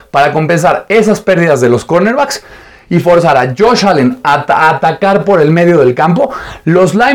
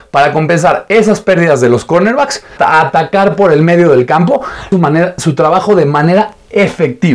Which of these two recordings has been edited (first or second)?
second